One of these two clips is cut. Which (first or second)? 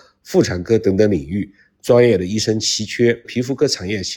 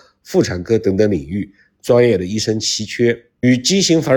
first